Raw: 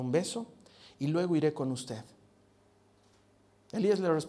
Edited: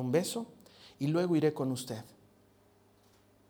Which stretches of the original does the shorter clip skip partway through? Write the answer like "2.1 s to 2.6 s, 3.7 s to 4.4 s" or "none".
none